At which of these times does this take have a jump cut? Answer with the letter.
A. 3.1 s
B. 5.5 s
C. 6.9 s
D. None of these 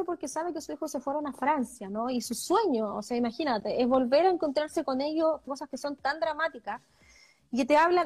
B